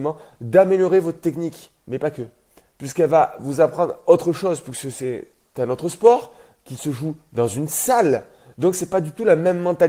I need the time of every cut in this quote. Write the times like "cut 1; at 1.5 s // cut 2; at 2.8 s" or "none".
cut 1; at 1.8 s